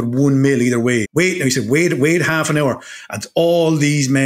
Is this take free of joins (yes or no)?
no